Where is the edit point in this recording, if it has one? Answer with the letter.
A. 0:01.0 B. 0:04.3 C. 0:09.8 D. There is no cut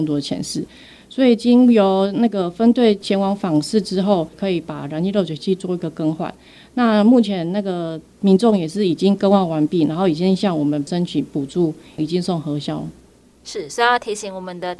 B